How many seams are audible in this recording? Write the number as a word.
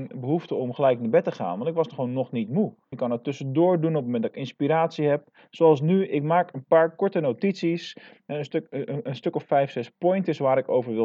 one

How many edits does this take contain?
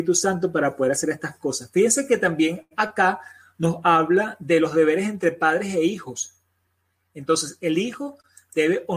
zero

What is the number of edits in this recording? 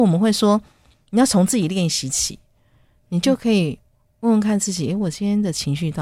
zero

